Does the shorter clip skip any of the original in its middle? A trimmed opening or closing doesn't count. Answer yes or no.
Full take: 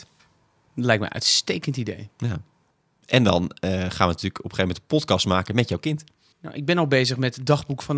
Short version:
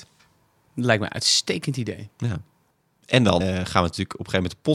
yes